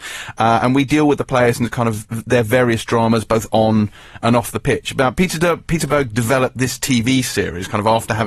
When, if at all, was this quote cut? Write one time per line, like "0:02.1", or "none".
none